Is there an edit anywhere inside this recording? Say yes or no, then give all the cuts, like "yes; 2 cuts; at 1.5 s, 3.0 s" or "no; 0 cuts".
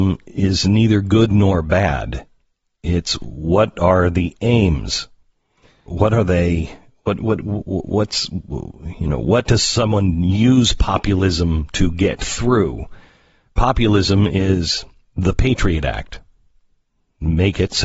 yes; 1 cut; at 5.9 s